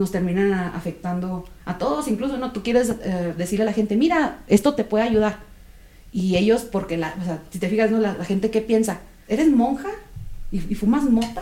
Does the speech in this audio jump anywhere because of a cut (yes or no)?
yes